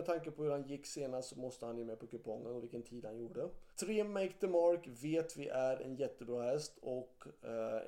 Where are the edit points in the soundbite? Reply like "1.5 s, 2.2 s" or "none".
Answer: 3.7 s